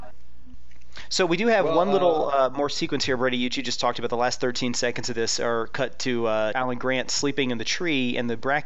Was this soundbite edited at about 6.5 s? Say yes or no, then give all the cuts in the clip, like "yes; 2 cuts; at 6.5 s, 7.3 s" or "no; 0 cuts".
yes; 1 cut; at 6.5 s